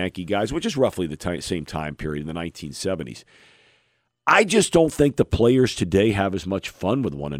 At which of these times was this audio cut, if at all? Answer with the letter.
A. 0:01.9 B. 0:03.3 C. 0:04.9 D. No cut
D